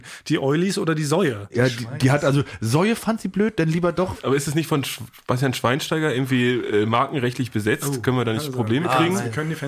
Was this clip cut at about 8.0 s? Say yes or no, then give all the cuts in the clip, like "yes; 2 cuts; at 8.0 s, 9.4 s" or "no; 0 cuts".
no; 1 cut; at 1.5 s